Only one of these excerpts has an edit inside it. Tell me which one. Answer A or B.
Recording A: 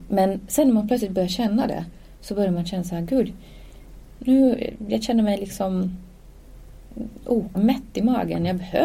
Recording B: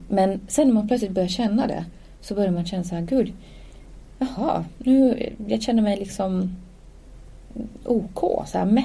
A